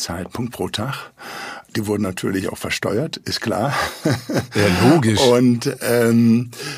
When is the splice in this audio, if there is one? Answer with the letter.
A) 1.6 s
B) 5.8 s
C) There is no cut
C